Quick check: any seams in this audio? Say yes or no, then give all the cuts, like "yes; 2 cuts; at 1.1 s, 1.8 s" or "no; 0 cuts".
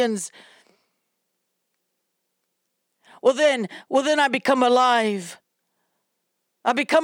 no; 0 cuts